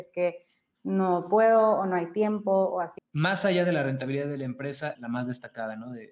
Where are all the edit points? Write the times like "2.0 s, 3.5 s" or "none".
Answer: 3.0 s, 4.9 s